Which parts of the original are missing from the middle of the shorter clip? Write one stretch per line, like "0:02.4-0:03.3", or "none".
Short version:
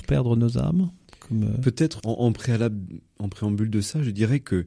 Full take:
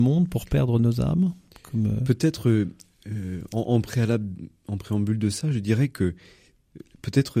0:02.4-0:03.5

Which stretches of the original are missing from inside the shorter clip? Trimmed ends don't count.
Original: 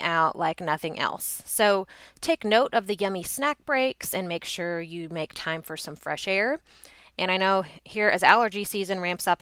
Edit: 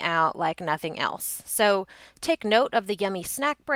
none

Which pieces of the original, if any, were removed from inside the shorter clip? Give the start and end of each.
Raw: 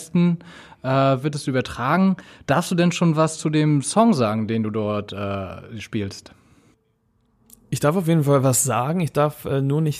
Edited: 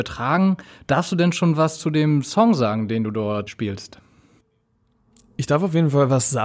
0:05.1-0:05.8

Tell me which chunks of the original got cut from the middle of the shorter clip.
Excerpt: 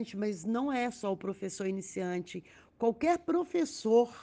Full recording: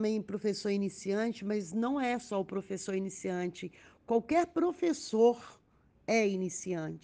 none

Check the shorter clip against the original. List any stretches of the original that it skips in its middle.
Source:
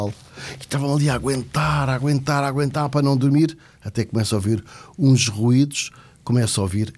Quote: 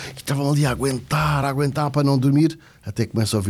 0:01.9-0:02.4

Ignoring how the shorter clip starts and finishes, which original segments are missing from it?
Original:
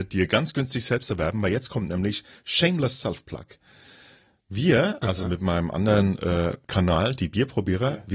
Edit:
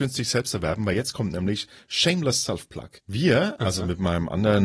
0:03.5-0:04.4

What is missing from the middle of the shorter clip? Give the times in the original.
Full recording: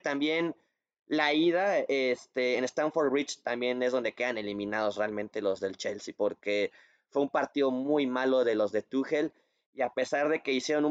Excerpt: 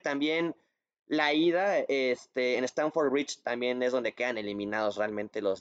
none

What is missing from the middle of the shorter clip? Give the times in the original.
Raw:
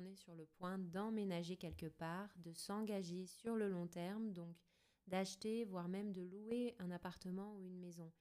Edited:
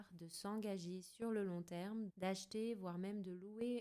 0:04.3-0:05.0

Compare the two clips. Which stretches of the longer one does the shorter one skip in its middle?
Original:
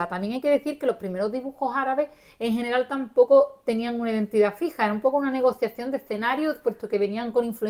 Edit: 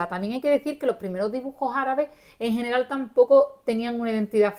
none

